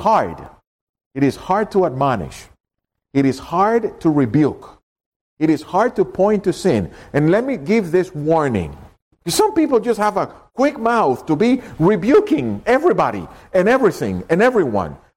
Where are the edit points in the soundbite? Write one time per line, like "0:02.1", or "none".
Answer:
0:09.1